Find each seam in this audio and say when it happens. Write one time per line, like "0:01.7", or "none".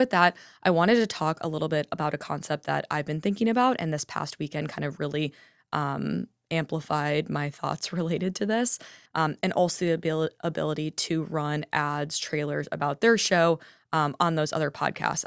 0:09.1